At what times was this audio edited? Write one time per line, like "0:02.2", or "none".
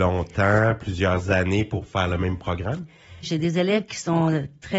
0:03.2